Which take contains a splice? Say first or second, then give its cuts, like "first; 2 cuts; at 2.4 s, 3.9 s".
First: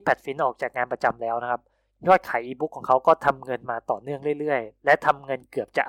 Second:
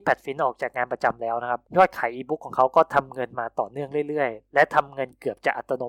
second; 1 cut; at 1.7 s